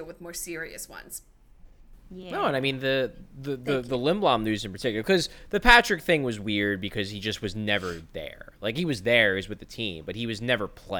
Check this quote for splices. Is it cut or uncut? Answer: uncut